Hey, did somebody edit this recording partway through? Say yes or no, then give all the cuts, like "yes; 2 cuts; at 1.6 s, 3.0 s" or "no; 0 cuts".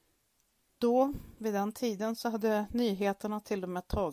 no; 0 cuts